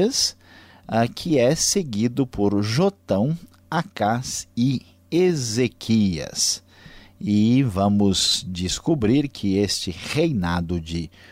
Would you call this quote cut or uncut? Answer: uncut